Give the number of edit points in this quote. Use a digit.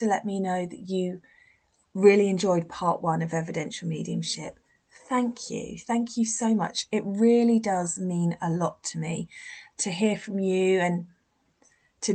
0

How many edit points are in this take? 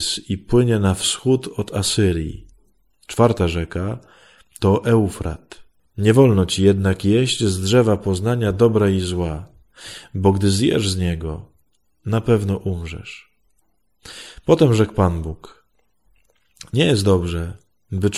1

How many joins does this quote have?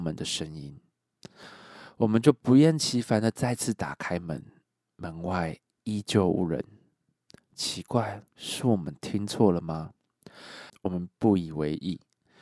2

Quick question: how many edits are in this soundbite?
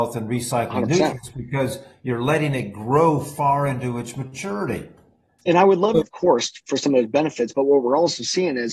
1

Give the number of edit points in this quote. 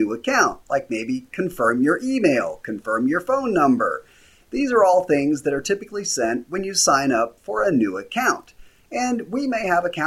0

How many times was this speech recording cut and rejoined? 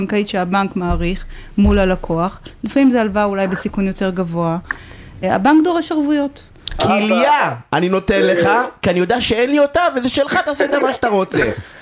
2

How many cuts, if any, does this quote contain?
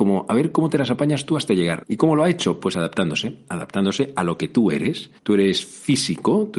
2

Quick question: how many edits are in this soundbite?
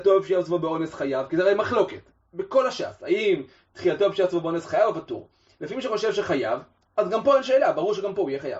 0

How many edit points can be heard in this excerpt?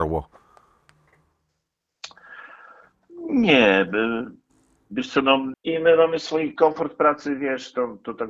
1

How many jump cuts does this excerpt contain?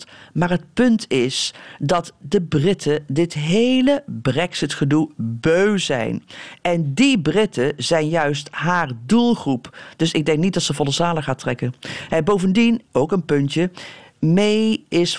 0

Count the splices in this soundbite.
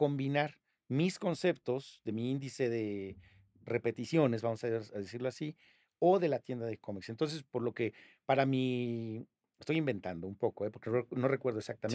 0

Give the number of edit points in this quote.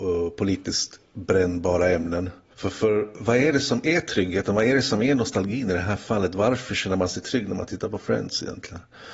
1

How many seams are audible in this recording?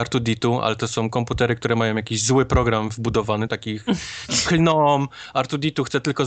1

